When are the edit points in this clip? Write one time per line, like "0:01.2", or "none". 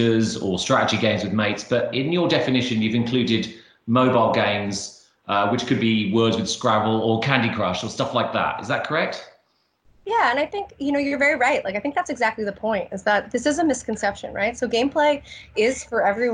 none